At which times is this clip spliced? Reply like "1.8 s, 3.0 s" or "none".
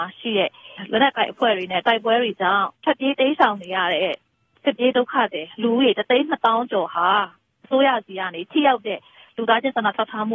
2.7 s